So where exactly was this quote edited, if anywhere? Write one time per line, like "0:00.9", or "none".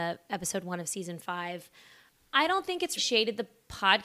0:03.0